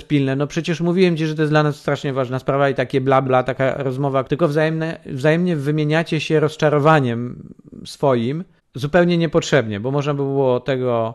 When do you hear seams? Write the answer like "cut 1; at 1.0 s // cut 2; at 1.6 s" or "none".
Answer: cut 1; at 3.2 s // cut 2; at 4.3 s